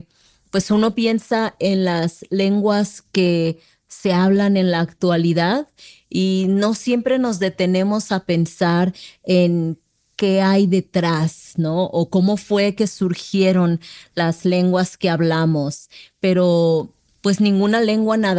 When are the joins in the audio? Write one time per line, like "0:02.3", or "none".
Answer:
none